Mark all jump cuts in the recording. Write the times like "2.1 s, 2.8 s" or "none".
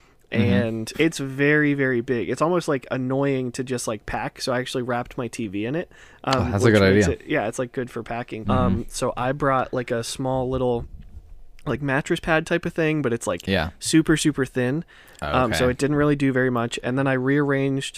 0.9 s, 8.4 s